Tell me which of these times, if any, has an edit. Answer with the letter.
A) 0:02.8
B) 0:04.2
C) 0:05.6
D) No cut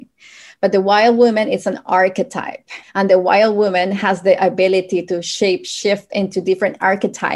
A